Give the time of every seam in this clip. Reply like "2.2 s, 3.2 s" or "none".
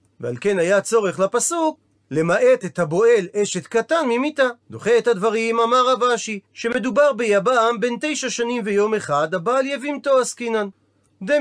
4.6 s, 6.4 s